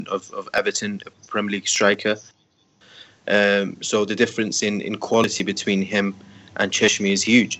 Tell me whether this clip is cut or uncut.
uncut